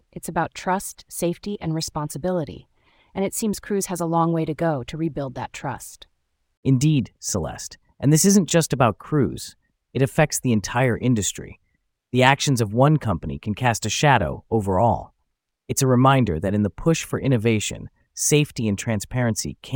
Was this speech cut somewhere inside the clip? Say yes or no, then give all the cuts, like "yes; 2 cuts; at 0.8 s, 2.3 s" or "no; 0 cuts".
no; 0 cuts